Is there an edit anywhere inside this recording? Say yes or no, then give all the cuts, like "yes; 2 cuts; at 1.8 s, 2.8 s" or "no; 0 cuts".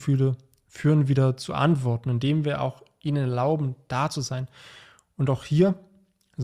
no; 0 cuts